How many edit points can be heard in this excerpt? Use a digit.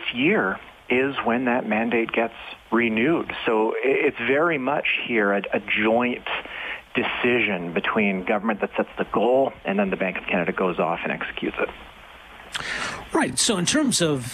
0